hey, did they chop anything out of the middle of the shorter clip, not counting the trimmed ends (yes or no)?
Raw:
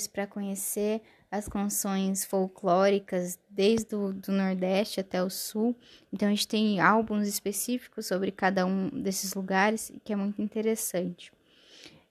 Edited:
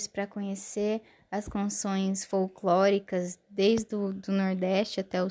no